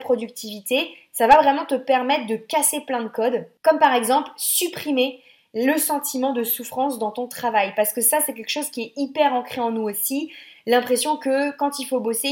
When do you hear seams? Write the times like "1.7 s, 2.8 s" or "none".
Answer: none